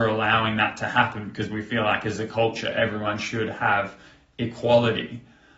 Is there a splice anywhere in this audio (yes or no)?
no